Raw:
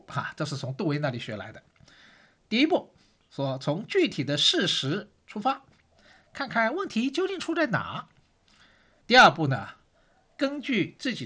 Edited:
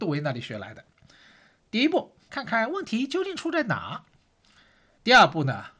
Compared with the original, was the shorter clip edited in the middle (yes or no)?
yes